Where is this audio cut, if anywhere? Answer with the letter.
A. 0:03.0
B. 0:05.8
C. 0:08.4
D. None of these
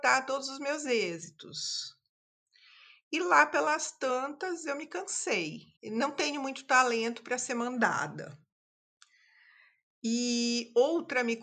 B